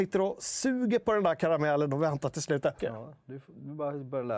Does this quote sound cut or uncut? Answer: cut